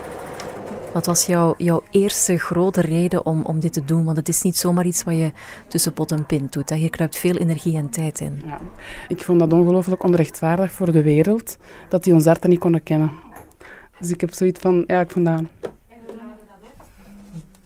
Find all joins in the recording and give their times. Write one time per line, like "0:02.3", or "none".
none